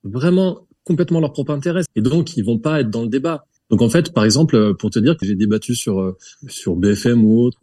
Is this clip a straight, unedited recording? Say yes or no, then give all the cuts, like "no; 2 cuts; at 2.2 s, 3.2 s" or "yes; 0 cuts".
no; 3 cuts; at 1.9 s, 3.6 s, 5.2 s